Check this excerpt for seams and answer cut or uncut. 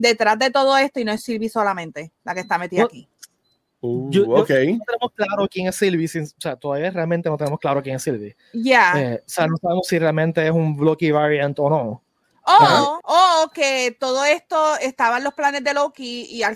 cut